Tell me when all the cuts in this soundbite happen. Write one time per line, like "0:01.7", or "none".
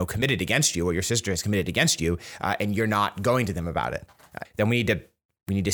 0:04.4